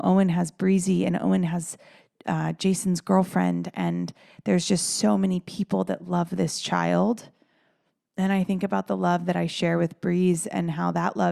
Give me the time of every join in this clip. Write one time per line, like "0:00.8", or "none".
none